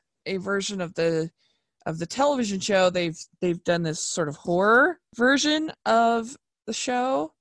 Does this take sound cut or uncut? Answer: uncut